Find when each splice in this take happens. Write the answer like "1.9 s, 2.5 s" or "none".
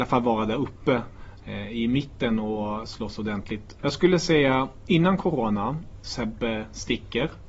3.8 s, 6.0 s